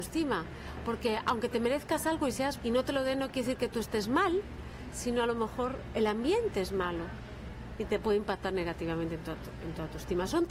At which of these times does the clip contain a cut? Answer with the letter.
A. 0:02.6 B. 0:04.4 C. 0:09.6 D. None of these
A